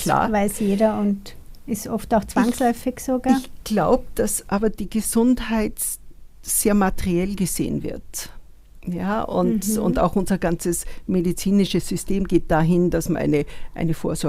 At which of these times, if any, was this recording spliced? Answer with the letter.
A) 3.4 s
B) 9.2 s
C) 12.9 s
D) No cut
D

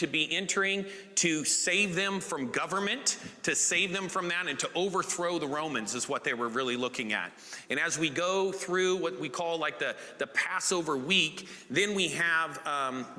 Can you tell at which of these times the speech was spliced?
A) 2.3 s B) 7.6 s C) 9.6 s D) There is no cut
D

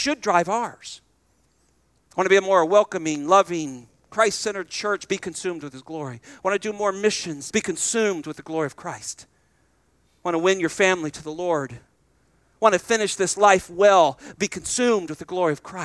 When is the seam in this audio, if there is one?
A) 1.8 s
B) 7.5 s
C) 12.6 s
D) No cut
B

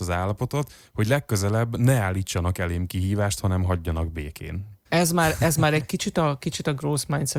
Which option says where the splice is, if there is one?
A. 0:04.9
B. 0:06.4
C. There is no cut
A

